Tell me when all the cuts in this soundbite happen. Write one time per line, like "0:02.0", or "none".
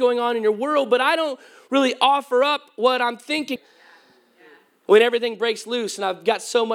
0:03.6